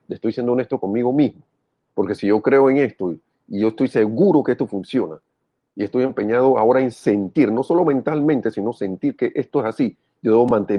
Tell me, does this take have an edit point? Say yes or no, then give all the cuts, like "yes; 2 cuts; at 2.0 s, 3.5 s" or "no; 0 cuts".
yes; 1 cut; at 1.9 s